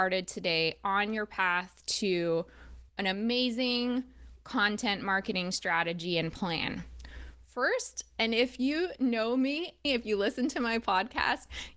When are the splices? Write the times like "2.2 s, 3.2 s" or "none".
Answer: 9.8 s